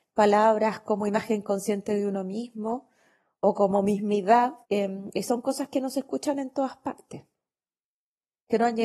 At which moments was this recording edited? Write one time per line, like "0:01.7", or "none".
0:04.6